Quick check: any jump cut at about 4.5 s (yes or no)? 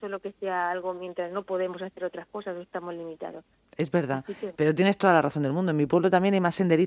yes